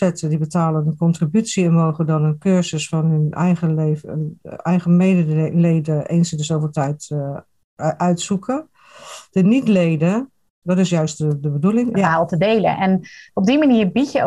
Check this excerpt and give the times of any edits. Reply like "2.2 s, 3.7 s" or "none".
10.6 s, 11.9 s